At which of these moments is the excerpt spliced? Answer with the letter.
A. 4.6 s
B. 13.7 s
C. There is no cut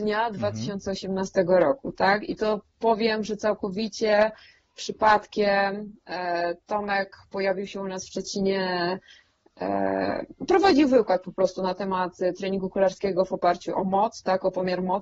B